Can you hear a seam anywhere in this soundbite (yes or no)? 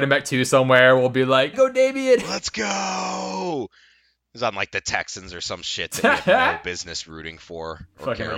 yes